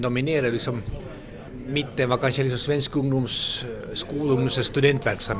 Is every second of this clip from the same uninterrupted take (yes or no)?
yes